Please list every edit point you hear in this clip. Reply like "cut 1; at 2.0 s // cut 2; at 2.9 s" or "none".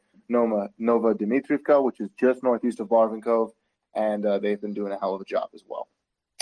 none